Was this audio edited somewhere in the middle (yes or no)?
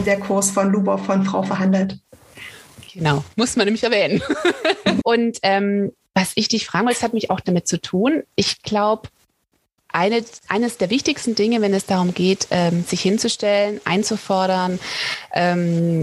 yes